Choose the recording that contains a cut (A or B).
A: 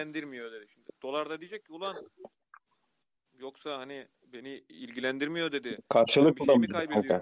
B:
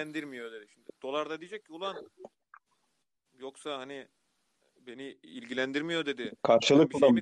A